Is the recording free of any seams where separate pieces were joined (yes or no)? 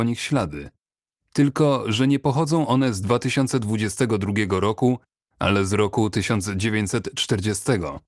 yes